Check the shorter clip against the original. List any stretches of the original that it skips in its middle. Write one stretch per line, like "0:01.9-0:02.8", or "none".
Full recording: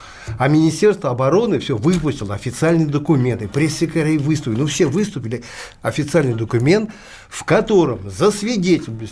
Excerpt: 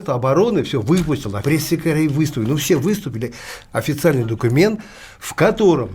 0:02.4-0:03.5